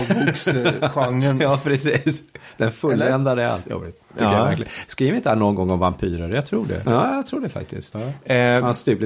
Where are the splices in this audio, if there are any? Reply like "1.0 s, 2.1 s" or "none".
6.9 s, 7.9 s